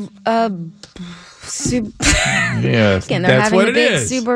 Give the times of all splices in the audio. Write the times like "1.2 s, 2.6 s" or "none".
3.0 s